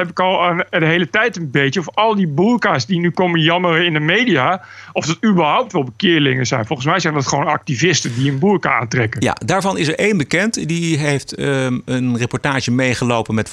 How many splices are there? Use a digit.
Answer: 0